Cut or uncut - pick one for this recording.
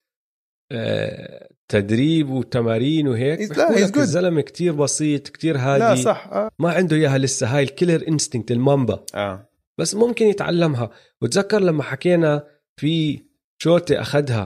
cut